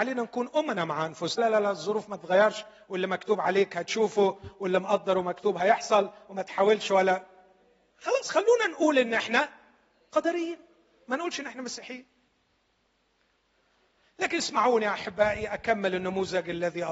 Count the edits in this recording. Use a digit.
1